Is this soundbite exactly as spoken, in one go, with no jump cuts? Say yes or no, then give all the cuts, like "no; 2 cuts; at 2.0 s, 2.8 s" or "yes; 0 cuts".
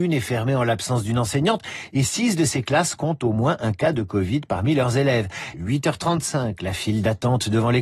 no; 1 cut; at 5.5 s